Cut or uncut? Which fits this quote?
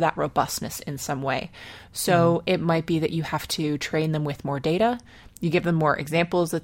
uncut